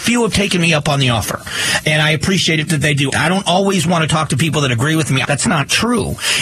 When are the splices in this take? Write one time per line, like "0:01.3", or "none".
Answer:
0:03.1
0:05.2